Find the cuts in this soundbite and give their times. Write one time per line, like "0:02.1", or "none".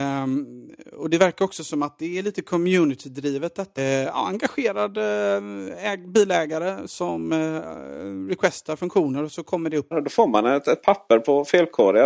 0:03.8
0:09.9